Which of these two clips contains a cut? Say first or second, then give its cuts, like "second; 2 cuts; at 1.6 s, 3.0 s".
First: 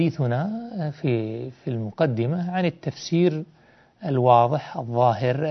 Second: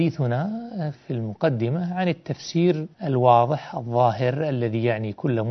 second; 2 cuts; at 0.9 s, 2.9 s